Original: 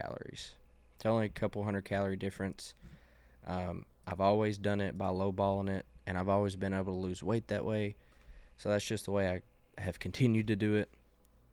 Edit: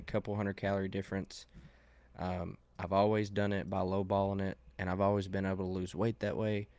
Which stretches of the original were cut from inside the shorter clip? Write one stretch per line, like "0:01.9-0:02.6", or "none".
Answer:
none